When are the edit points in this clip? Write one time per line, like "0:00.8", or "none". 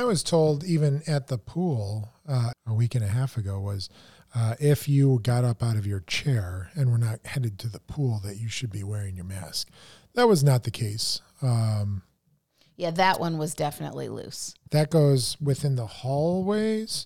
0:02.5
0:14.7